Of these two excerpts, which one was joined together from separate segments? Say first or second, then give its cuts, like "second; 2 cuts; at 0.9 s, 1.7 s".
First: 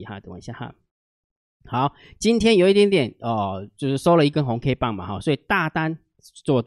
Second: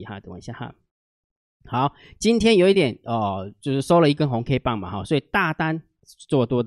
second; 1 cut; at 2.7 s